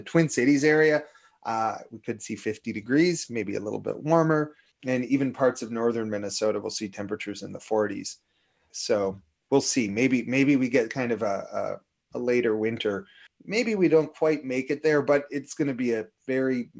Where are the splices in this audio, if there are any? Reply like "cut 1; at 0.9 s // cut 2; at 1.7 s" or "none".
cut 1; at 4.7 s // cut 2; at 8.7 s // cut 3; at 13.3 s